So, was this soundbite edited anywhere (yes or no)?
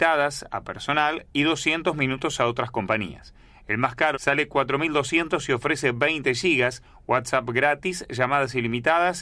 yes